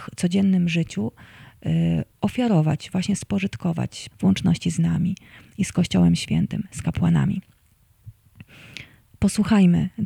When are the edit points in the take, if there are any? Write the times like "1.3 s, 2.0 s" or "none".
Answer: 4.1 s